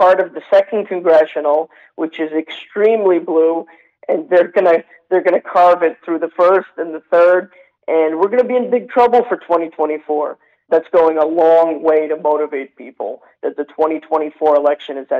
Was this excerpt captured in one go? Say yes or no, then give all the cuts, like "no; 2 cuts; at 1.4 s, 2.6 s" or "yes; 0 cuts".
no; 1 cut; at 10.7 s